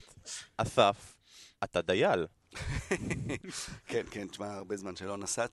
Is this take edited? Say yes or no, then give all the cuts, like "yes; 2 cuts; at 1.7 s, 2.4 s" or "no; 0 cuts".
no; 0 cuts